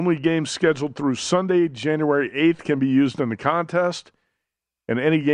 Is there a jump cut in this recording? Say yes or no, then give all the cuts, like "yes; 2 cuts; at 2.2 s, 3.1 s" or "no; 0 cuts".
no; 0 cuts